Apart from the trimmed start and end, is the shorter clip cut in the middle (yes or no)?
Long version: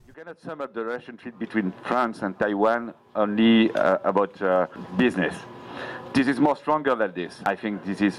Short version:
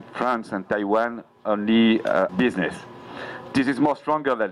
yes